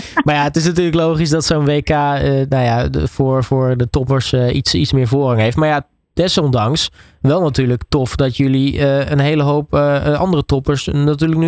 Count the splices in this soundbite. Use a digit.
0